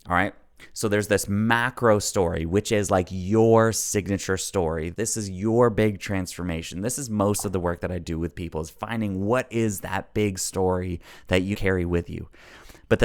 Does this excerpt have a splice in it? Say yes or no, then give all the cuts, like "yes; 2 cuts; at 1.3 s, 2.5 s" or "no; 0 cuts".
yes; 2 cuts; at 4.9 s, 11.5 s